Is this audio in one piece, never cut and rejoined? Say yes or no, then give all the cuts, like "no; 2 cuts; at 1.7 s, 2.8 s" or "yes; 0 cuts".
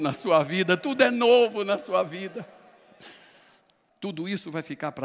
no; 1 cut; at 3.9 s